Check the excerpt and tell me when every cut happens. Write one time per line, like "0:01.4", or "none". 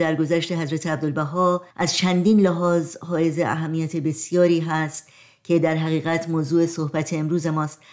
0:01.7